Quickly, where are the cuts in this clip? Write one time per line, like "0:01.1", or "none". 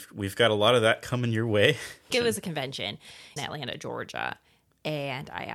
0:02.1
0:03.4